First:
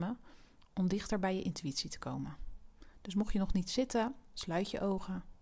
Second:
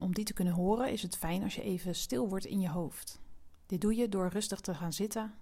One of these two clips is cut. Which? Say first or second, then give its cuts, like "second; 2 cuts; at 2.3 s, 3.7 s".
first; 1 cut; at 4.2 s